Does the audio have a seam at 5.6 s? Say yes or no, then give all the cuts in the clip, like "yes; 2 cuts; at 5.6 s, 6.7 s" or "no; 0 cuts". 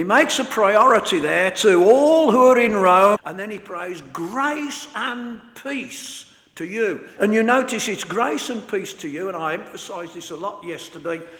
no; 2 cuts; at 3.2 s, 7.2 s